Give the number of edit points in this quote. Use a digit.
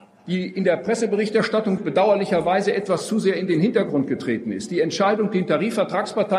1